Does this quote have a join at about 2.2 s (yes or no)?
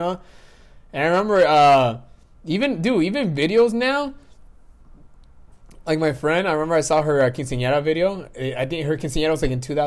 no